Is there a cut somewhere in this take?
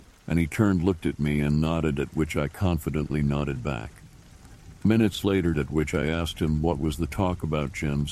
yes; 1 cut; at 5.5 s

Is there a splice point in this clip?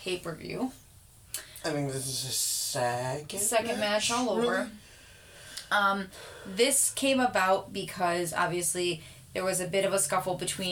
no; 0 cuts

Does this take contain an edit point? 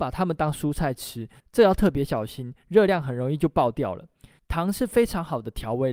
yes; 1 cut; at 4.4 s

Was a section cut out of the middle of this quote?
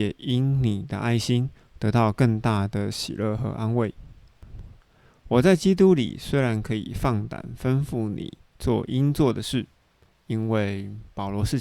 no; 0 cuts

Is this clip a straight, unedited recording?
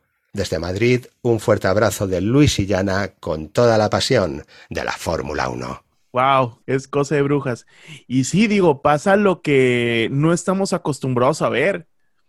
no; 1 cut; at 6.6 s

